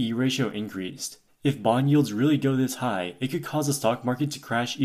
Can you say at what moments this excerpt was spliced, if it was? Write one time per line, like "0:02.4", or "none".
0:01.3